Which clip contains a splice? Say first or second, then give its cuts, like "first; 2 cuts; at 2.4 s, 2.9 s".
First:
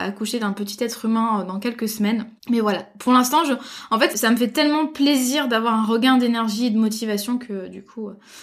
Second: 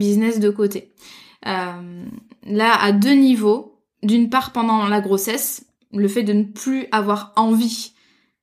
first; 2 cuts; at 2.4 s, 4.1 s